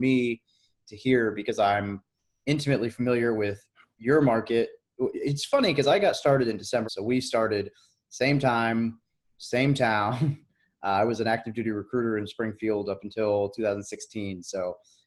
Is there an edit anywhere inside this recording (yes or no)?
yes